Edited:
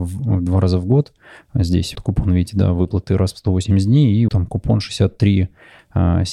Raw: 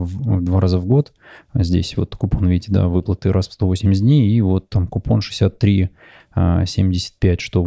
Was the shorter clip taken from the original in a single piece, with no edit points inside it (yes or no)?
no